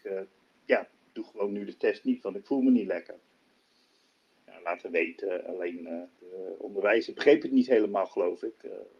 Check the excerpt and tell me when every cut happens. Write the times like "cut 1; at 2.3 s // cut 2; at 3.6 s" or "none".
cut 1; at 6.1 s